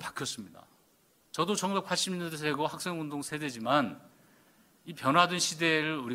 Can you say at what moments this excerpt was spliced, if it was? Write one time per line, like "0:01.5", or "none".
none